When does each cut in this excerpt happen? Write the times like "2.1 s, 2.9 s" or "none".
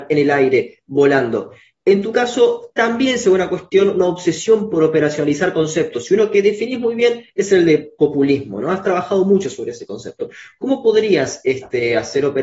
none